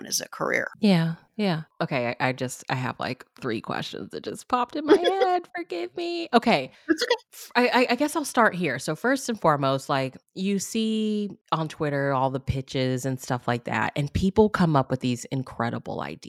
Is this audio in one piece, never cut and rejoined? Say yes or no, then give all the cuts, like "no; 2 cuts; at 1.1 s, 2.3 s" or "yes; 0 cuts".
yes; 0 cuts